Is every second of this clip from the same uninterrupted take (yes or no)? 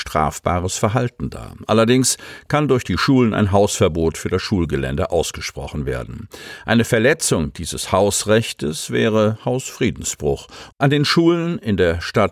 no